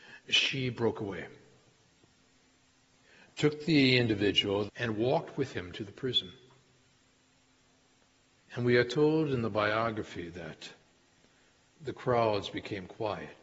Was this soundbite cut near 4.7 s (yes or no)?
yes